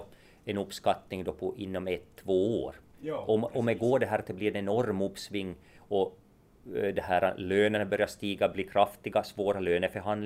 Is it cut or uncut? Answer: uncut